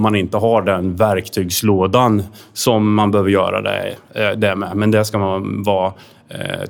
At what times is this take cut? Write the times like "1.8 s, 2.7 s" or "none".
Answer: none